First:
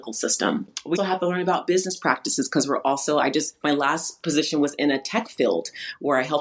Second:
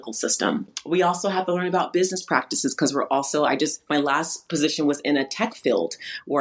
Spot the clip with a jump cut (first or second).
first